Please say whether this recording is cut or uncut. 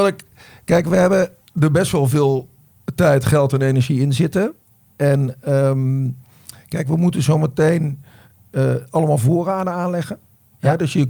uncut